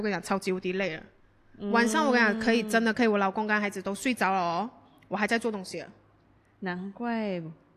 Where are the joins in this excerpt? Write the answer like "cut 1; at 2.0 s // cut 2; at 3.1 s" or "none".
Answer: none